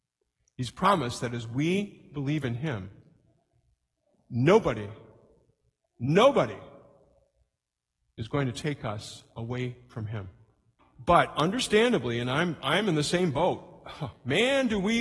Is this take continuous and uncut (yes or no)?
no